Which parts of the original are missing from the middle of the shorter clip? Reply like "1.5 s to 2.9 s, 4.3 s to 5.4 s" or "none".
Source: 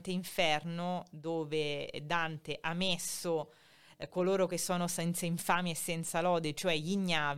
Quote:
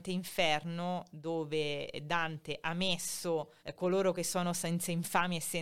3.6 s to 3.9 s